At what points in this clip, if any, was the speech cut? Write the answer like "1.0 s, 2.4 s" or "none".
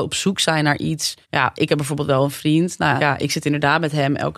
1.2 s, 3.0 s